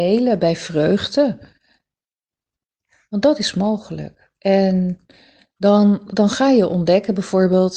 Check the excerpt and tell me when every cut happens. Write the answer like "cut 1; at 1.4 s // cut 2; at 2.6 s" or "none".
none